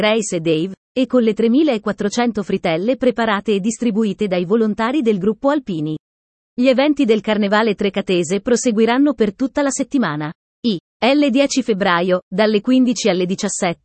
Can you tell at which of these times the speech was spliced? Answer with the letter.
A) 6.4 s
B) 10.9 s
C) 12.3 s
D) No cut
D